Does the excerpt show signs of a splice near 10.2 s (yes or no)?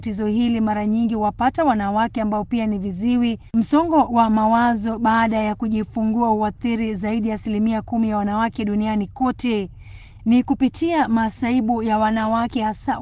yes